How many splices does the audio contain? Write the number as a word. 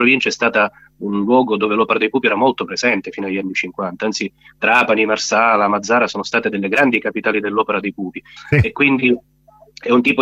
one